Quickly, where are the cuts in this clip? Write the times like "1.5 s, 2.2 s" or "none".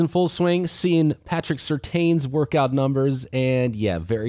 none